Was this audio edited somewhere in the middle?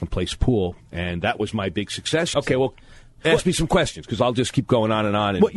yes; 1 cut; at 2.3 s

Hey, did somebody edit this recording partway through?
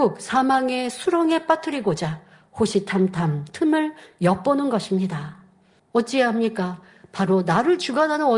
yes; 1 cut; at 5.8 s

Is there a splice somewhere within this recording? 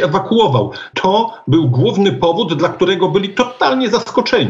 yes; 1 cut; at 0.9 s

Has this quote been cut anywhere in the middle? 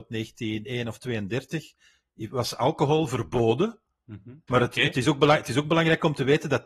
yes; 1 cut; at 4.5 s

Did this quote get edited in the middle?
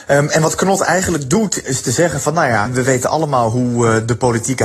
yes; 2 cuts; at 1.6 s, 2.7 s

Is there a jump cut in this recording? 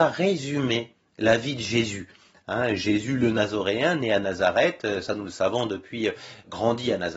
no; 0 cuts

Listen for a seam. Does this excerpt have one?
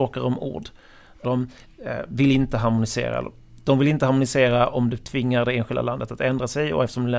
yes; 1 cut; at 1.2 s

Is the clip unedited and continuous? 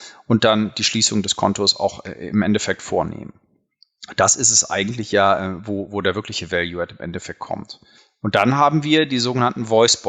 yes; 0 cuts

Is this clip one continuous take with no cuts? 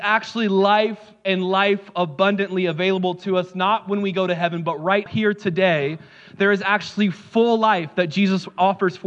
no; 1 cut; at 5.1 s

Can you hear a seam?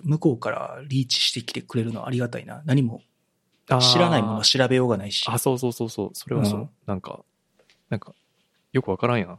no; 0 cuts

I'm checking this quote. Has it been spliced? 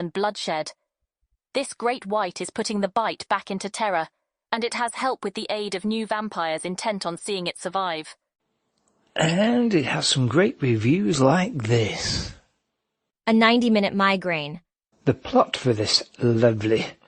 yes; 1 cut; at 14.9 s

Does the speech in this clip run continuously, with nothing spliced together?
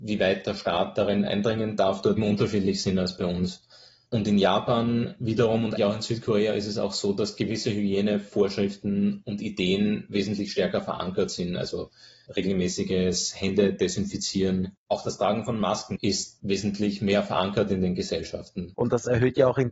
no; 3 cuts; at 2.2 s, 5.8 s, 18.7 s

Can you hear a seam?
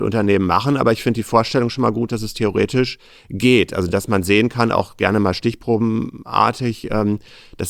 no; 0 cuts

